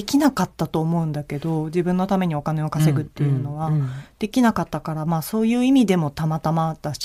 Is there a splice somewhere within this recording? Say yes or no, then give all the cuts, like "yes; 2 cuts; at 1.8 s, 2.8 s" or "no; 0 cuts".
no; 0 cuts